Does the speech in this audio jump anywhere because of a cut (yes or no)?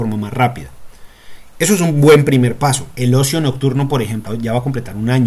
yes